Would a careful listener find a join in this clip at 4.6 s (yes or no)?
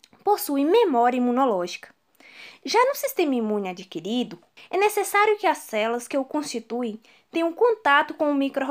yes